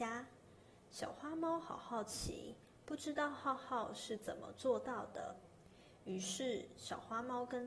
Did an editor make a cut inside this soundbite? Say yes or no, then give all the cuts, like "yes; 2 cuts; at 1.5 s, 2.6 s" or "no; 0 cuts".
no; 0 cuts